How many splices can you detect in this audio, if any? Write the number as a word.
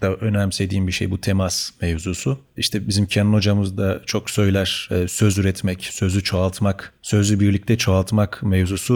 zero